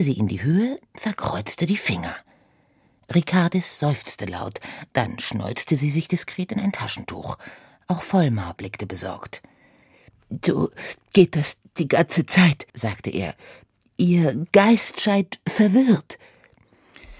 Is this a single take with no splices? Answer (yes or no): no